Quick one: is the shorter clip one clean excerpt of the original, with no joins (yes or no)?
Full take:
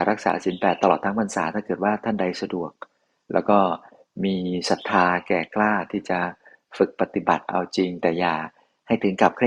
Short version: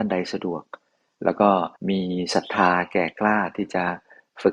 no